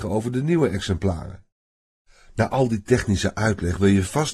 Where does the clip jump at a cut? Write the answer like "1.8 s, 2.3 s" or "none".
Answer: none